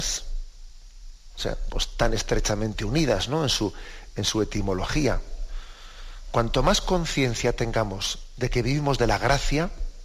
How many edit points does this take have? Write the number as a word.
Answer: one